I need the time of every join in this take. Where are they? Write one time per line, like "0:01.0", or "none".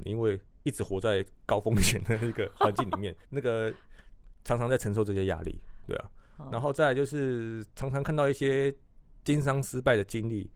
0:03.2